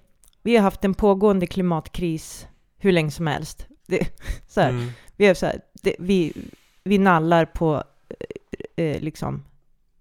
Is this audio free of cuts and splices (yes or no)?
no